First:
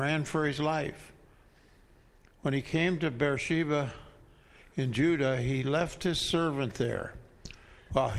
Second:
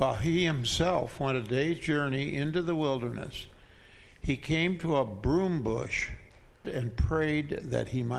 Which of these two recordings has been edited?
second; 1 cut; at 6.6 s

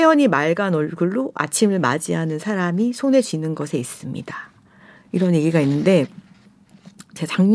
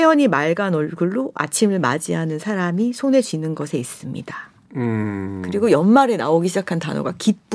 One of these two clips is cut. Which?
second; 1 cut; at 4.7 s

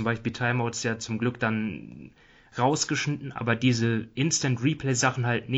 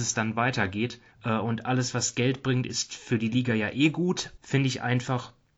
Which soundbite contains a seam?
second; 2 cuts; at 1.1 s, 4.4 s

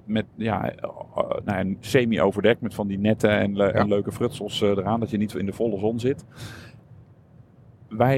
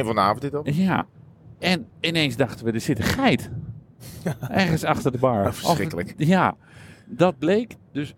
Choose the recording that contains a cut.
second; 1 cut; at 1.9 s

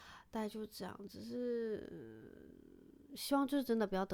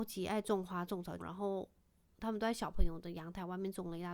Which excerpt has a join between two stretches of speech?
second; 1 cut; at 1.2 s

